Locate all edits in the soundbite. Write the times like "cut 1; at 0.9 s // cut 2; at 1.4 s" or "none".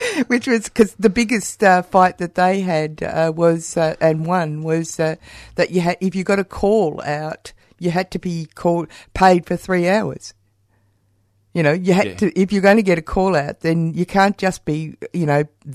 none